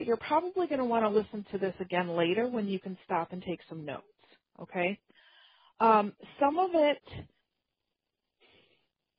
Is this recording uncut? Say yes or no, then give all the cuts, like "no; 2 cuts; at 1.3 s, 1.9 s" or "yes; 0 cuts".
yes; 0 cuts